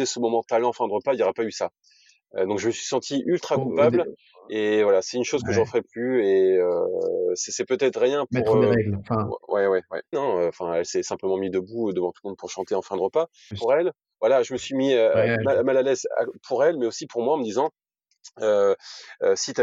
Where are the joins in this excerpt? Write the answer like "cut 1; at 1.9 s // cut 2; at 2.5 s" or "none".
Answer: cut 1; at 10.1 s // cut 2; at 13.5 s